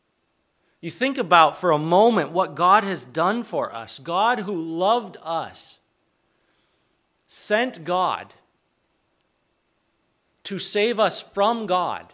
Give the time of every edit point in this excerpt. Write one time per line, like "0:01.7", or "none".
none